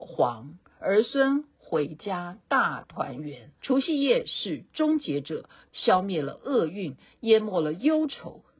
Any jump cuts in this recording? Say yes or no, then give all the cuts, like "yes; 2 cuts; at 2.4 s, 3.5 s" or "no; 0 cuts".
yes; 2 cuts; at 3.6 s, 5.7 s